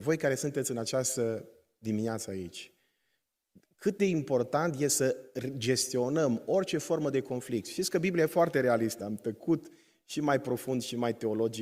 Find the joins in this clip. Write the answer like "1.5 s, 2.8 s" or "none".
9.0 s